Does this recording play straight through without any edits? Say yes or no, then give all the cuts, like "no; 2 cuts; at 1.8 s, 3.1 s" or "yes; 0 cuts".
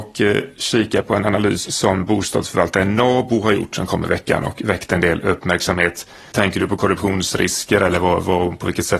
no; 1 cut; at 6.3 s